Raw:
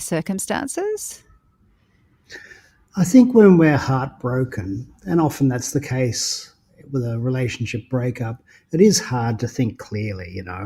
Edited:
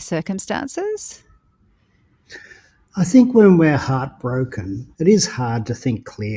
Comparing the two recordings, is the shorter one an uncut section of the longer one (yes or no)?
no